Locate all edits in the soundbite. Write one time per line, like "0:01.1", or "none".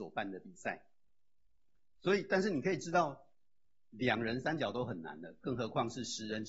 none